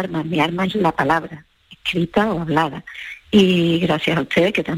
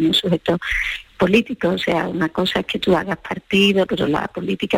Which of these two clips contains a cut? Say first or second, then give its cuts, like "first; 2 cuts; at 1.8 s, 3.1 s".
second; 1 cut; at 3.8 s